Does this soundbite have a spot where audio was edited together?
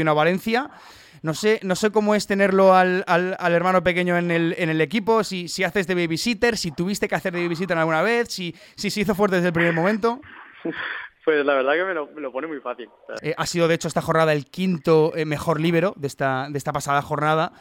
yes; 1 cut; at 13.2 s

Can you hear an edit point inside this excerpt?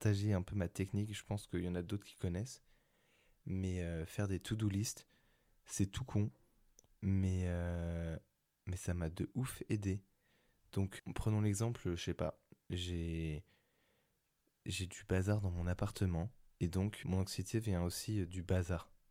yes; 3 cuts; at 6.9 s, 11.0 s, 17.0 s

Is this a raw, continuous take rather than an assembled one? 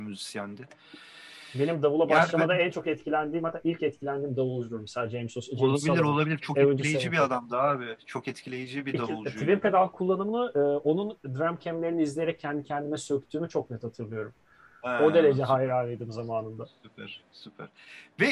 yes; 0 cuts

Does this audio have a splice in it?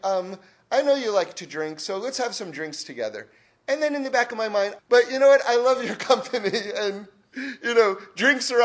yes; 1 cut; at 4.8 s

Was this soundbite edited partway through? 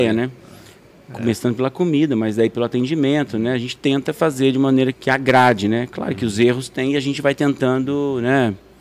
yes; 1 cut; at 4.9 s

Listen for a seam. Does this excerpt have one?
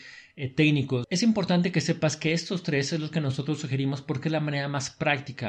yes; 1 cut; at 1.0 s

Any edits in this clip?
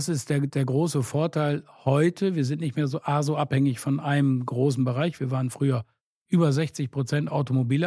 no; 0 cuts

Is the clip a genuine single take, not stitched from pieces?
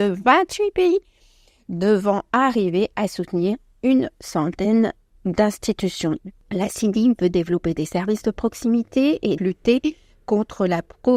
no; 1 cut; at 9.4 s

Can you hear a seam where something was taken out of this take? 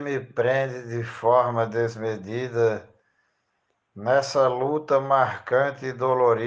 no; 0 cuts

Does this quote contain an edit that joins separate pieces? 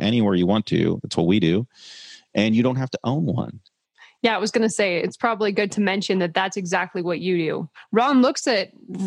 no; 0 cuts

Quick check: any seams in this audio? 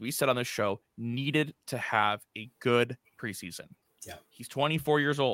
yes; 1 cut; at 4.0 s

